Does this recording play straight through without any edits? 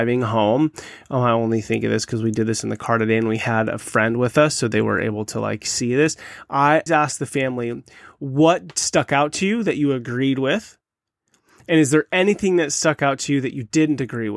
no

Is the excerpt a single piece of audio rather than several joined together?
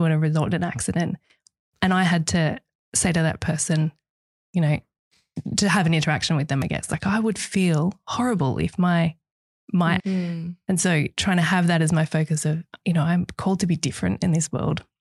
no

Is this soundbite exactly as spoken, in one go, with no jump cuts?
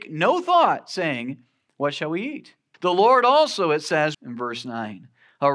no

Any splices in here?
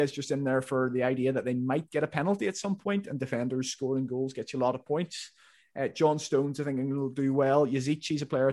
no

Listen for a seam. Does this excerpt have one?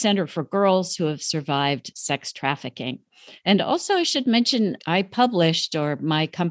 yes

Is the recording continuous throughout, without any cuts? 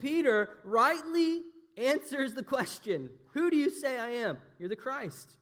yes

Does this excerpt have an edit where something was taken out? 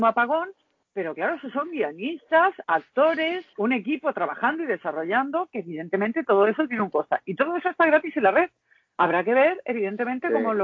yes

